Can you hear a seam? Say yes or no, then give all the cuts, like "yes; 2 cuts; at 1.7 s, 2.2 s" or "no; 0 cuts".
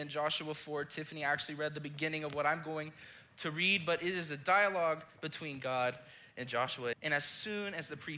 yes; 1 cut; at 6.9 s